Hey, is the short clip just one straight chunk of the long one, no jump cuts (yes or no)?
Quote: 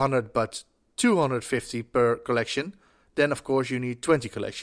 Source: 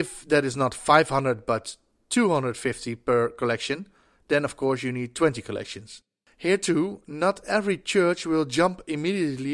yes